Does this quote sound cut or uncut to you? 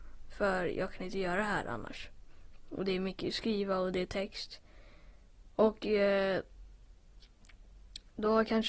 uncut